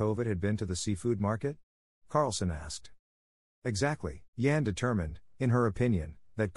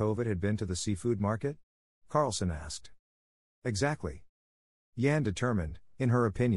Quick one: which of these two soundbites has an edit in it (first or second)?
first